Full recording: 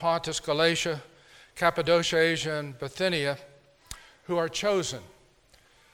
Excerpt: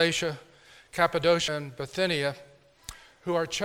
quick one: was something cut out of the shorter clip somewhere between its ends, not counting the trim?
yes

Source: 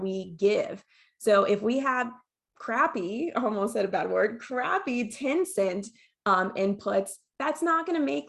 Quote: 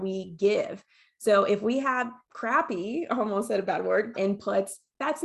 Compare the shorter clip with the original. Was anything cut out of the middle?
yes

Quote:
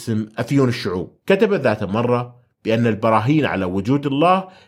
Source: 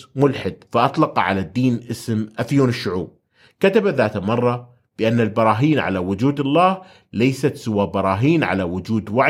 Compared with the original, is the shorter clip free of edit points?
no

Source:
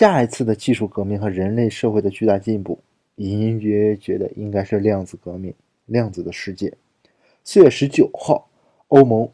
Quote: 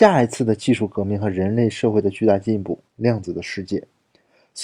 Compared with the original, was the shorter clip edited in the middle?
yes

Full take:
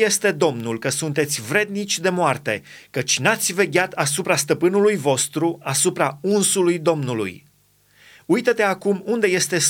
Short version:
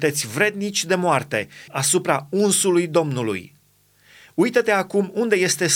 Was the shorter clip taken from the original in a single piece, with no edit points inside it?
no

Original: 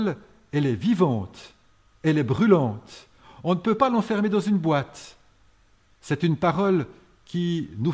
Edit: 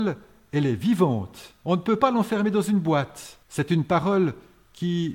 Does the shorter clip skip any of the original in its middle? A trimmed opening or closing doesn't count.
yes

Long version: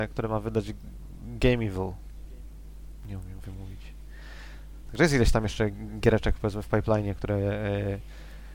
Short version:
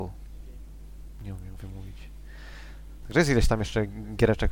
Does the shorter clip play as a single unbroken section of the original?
yes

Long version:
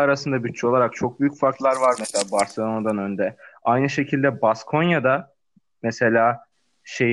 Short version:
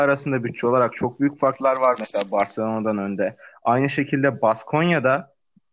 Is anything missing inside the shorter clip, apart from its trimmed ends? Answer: no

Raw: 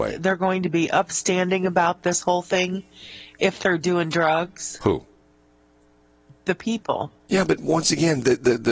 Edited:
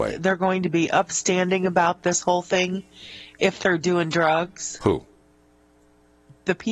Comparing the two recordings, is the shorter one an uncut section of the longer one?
yes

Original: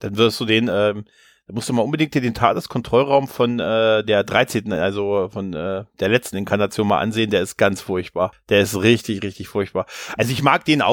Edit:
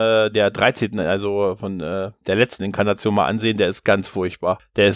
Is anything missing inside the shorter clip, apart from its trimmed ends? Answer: no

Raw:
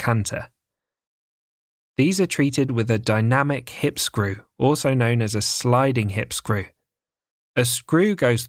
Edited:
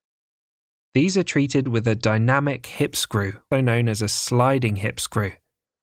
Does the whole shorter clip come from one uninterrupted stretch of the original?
no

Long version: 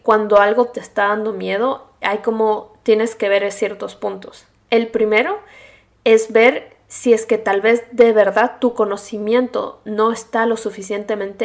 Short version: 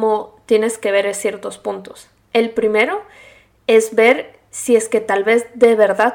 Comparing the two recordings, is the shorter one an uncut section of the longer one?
yes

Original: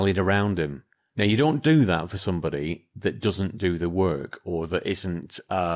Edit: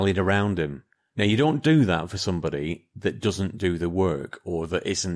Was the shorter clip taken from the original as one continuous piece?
yes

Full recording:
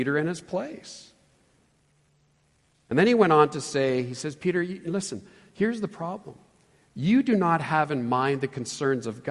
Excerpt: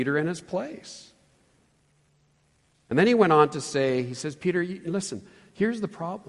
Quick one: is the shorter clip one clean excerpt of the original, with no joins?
yes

